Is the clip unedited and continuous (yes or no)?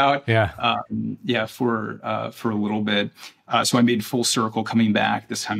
yes